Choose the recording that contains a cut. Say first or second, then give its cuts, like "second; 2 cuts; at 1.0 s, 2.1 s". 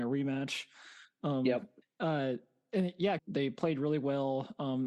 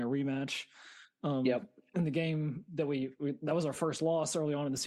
first; 2 cuts; at 1.8 s, 3.2 s